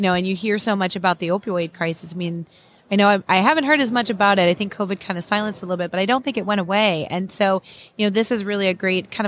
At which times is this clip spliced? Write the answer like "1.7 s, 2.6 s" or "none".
none